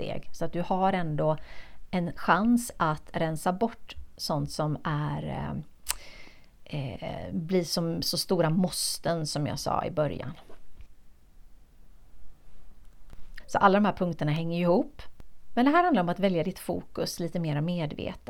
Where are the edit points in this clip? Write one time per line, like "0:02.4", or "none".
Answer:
0:13.4